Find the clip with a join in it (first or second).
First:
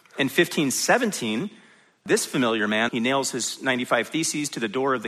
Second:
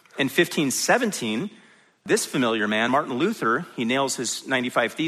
first